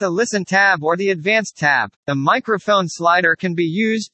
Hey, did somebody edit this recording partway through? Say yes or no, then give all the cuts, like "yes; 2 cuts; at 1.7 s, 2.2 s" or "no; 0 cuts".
yes; 1 cut; at 2.0 s